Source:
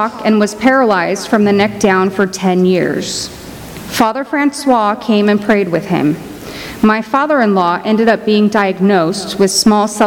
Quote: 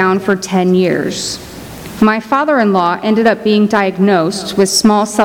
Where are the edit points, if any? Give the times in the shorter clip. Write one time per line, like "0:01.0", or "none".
0:02.0